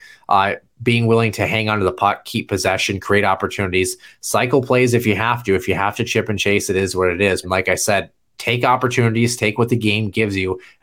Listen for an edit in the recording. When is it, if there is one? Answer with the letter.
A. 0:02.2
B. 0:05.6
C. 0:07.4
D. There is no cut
C